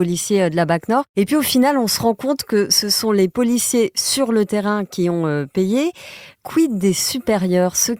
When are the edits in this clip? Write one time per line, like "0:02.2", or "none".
none